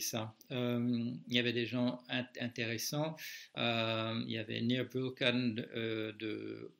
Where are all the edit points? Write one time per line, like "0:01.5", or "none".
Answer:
0:03.5